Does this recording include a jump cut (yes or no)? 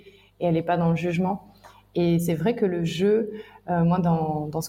no